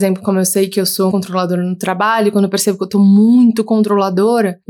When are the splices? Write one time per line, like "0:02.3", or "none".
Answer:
0:01.1